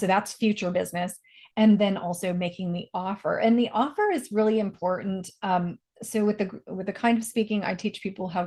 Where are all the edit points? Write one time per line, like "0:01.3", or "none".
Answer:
none

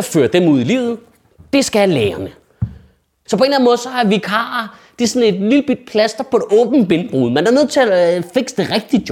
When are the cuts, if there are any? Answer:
0:03.3

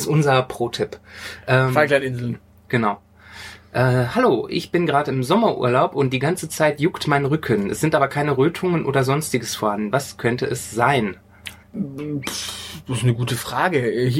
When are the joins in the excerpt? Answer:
0:11.6

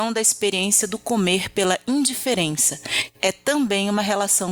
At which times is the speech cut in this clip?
0:03.2

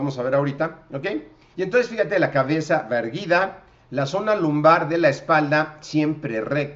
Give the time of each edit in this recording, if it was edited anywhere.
0:01.5

